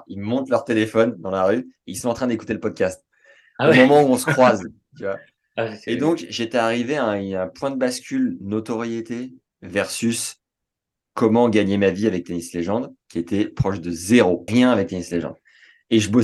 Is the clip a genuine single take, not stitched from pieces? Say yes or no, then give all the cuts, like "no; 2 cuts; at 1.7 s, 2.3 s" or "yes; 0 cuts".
no; 1 cut; at 14.5 s